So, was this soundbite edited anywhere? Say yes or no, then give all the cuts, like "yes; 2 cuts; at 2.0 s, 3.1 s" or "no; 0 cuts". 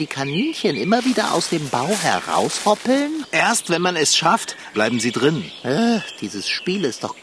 yes; 2 cuts; at 3.2 s, 4.7 s